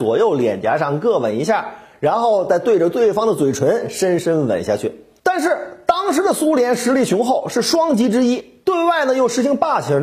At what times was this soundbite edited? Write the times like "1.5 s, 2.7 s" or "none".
5.2 s